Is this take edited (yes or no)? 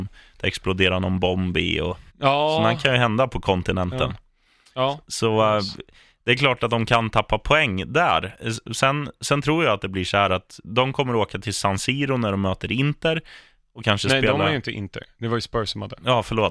yes